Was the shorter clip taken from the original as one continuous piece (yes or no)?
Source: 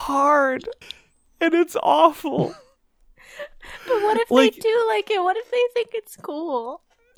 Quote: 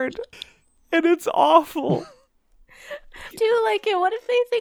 no